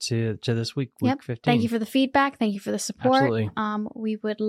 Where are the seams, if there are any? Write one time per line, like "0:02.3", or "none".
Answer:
none